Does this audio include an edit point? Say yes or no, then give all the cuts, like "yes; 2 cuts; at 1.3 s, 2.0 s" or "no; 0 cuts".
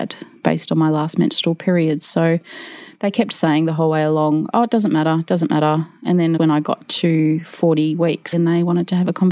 yes; 2 cuts; at 6.4 s, 8.3 s